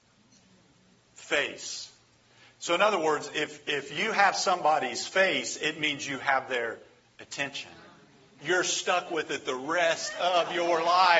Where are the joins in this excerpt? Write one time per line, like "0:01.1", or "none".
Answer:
0:03.6
0:08.4